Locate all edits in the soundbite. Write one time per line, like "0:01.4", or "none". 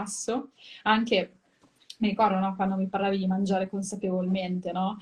none